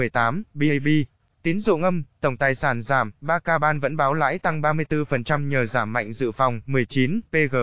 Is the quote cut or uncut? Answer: uncut